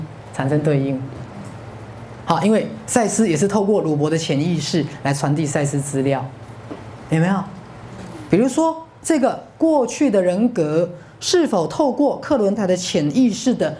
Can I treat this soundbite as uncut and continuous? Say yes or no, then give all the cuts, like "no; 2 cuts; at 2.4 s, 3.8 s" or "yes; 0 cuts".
no; 2 cuts; at 8.3 s, 12.6 s